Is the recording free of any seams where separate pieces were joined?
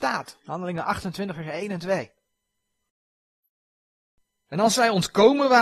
yes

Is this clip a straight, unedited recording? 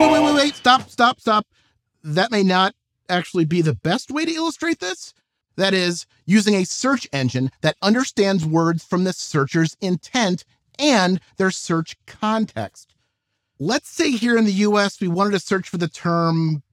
no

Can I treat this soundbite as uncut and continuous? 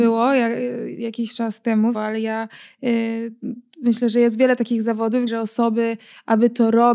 no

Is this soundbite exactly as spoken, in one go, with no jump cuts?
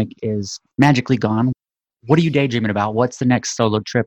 yes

